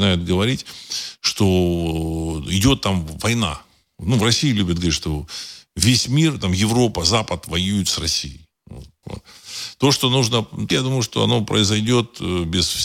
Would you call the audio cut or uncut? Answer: cut